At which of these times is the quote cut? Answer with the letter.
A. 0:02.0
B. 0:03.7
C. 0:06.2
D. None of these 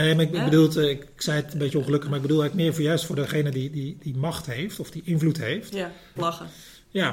C